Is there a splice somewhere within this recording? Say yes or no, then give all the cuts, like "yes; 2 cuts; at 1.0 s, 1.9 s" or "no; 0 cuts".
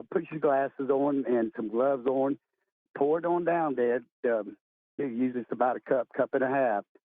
yes; 1 cut; at 5.0 s